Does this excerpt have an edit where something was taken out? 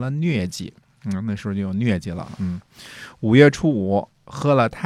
no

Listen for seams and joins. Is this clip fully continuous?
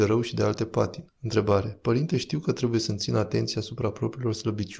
no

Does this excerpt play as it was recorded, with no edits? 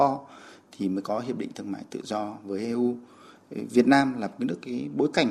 yes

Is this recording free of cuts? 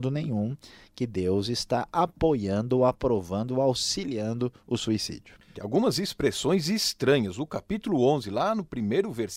no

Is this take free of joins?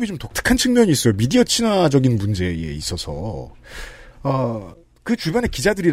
yes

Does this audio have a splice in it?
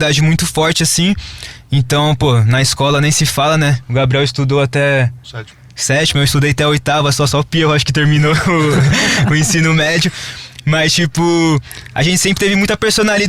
no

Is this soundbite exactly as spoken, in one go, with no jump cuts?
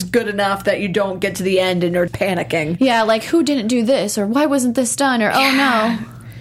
no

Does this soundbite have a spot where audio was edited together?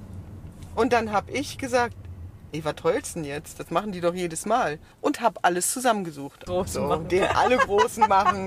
yes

